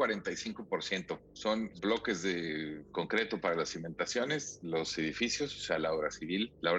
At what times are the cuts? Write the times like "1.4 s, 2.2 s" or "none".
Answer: none